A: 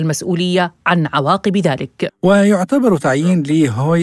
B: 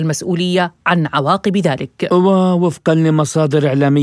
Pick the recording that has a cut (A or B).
A